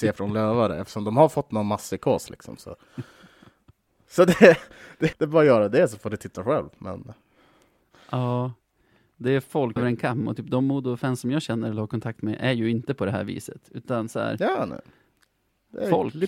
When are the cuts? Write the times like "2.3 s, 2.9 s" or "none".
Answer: 5.1 s, 9.8 s